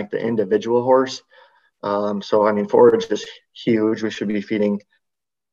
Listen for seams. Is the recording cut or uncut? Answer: uncut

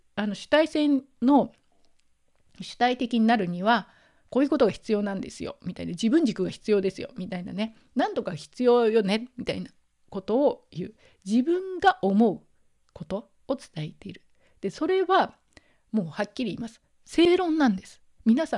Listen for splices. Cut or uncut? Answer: uncut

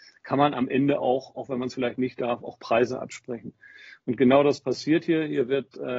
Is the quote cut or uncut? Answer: uncut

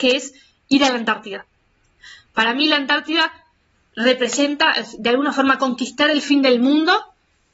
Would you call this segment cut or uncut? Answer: uncut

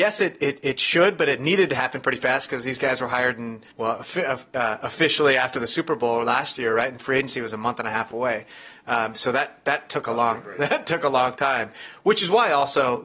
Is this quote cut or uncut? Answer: cut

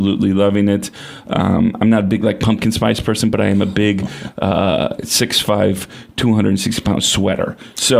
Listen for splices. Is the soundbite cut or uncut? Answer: uncut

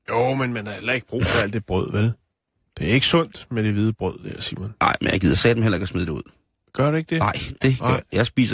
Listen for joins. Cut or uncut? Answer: uncut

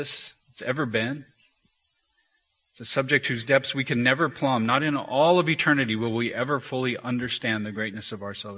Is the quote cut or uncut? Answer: uncut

